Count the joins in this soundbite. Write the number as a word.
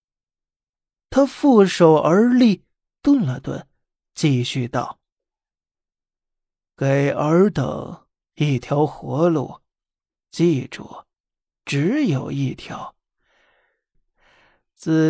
one